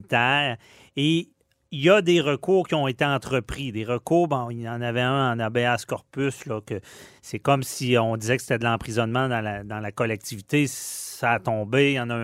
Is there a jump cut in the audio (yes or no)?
no